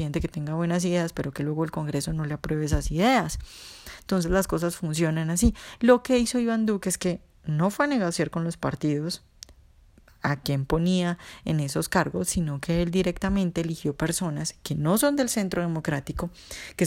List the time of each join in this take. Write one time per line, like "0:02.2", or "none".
none